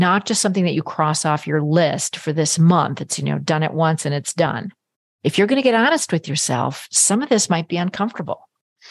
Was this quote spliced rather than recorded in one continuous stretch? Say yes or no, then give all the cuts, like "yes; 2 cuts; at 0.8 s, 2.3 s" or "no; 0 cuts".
yes; 1 cut; at 5.1 s